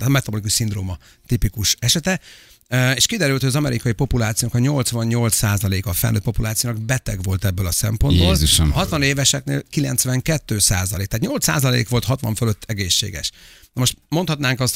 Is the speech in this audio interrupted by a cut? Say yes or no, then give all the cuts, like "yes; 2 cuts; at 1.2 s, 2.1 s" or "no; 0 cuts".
no; 0 cuts